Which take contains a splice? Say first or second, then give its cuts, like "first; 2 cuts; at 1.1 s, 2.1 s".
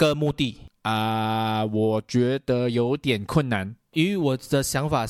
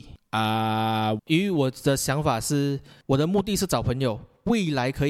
second; 1 cut; at 1.2 s